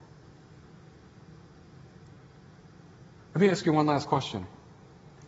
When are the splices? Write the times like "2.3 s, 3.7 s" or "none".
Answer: none